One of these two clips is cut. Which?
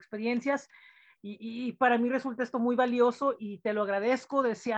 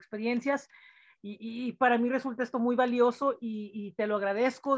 first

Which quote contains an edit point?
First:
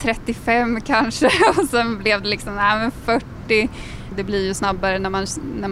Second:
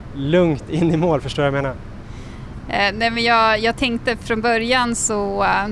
first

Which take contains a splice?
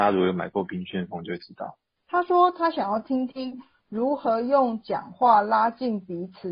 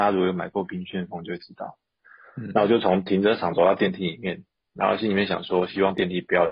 first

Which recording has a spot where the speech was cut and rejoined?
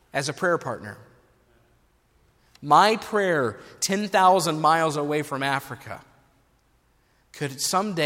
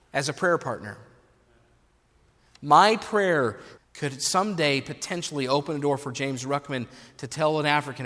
second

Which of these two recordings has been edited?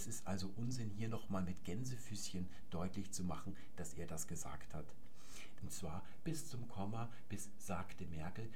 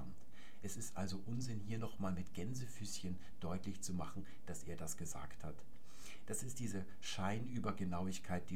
first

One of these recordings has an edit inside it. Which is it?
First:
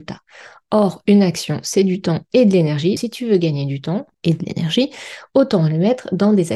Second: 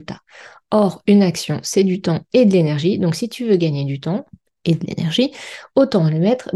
first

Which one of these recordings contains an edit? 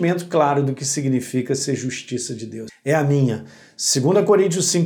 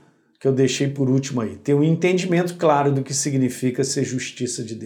first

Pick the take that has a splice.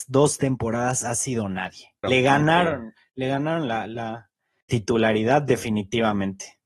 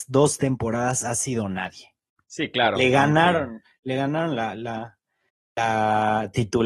first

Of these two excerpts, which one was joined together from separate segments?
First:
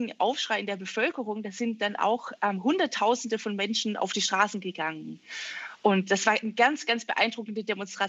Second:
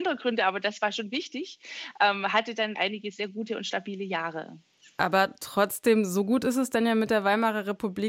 second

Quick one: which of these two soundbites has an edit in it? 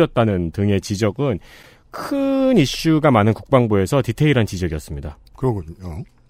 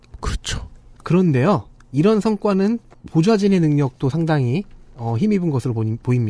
second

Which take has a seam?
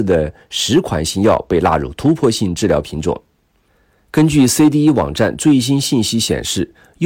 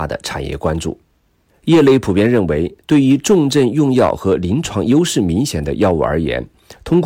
second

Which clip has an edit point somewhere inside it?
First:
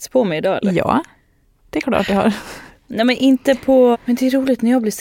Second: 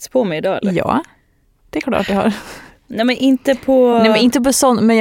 first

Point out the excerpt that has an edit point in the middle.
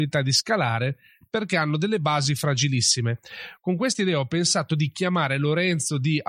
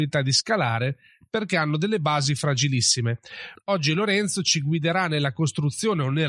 second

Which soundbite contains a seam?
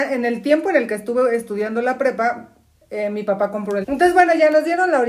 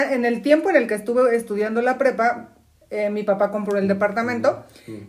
first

